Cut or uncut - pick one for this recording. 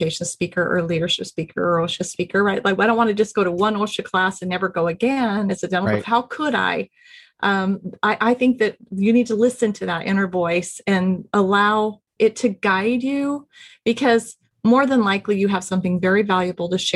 cut